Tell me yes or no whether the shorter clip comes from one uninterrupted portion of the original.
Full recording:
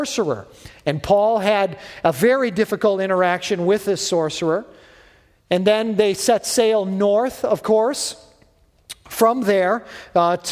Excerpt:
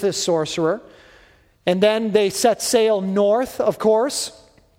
yes